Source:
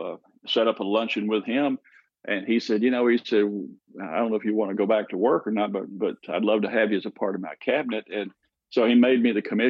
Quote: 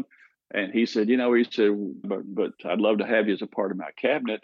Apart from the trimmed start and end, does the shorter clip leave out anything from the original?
yes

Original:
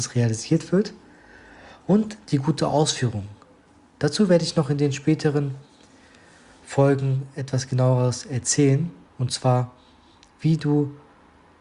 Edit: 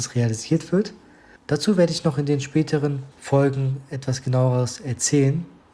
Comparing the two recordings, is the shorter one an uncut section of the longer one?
no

